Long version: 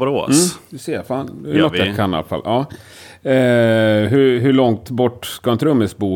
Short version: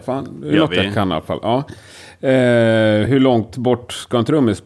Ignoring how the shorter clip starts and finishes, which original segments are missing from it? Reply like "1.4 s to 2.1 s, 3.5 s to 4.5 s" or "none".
4.1 s to 4.4 s